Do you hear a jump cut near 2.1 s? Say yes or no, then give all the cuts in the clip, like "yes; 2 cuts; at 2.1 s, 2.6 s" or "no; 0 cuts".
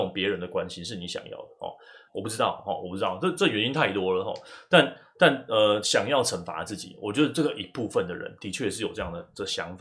yes; 2 cuts; at 2.1 s, 5.8 s